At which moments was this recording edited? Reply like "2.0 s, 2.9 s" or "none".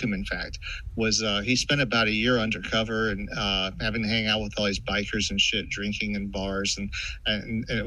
none